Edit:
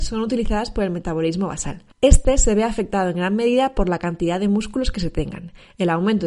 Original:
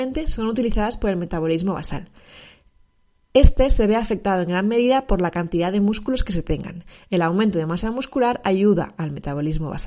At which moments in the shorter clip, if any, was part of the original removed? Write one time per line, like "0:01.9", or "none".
0:01.9